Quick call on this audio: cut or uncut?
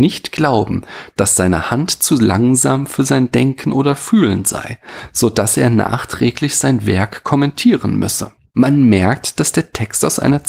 uncut